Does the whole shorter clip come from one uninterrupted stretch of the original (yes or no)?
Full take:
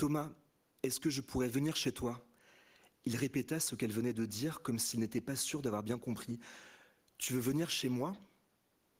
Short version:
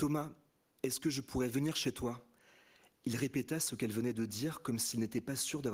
yes